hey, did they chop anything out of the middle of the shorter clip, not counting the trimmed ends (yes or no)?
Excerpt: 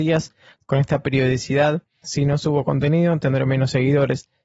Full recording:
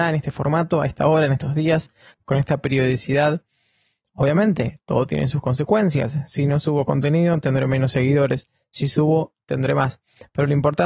yes